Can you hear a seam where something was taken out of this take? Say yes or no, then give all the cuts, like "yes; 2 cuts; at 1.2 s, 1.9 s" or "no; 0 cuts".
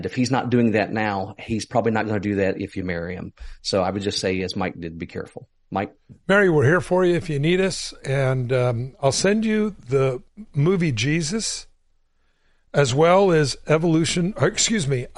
no; 0 cuts